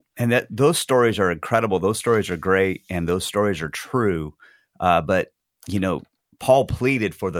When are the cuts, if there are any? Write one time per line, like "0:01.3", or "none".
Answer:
none

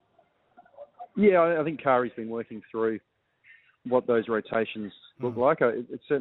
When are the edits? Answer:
none

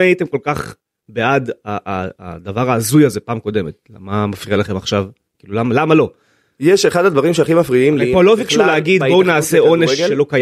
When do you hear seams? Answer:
none

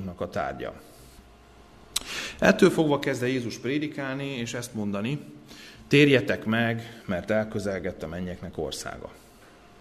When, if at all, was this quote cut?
none

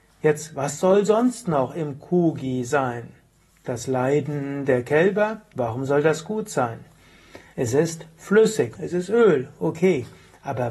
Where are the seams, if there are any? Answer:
0:05.5
0:07.5
0:08.8

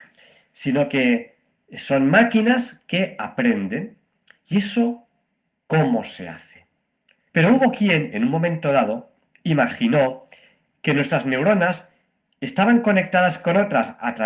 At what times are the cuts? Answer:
0:07.3

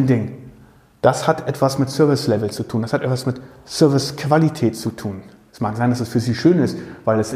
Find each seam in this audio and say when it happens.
0:05.5

